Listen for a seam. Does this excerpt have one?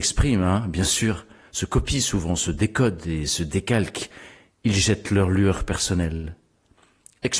no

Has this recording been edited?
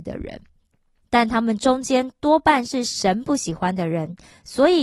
yes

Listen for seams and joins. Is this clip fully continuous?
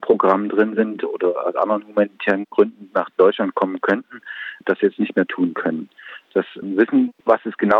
yes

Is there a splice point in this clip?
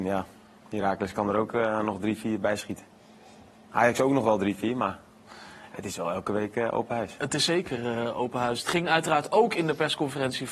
no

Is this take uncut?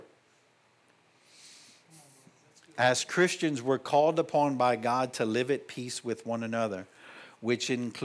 yes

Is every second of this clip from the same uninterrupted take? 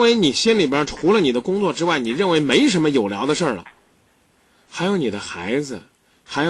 yes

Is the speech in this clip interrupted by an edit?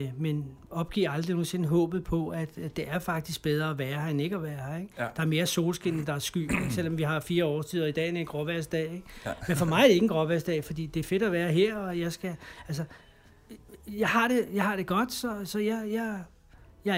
no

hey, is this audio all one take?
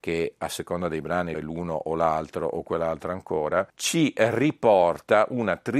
no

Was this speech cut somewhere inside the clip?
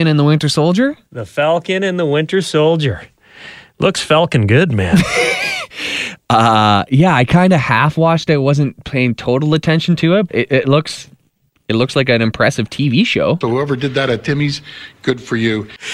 yes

